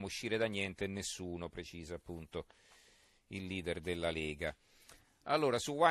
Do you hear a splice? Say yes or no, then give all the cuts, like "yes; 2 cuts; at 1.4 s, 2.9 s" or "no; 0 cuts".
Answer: no; 0 cuts